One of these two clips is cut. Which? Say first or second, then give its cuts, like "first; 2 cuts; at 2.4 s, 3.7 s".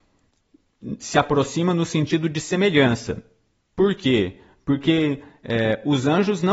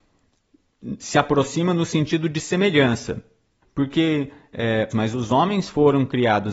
second; 2 cuts; at 3.6 s, 4.9 s